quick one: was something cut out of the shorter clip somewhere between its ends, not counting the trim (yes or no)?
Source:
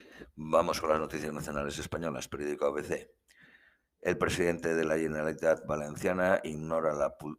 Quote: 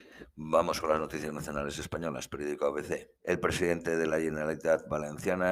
yes